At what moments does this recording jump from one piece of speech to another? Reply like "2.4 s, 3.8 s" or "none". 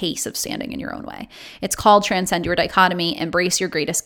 none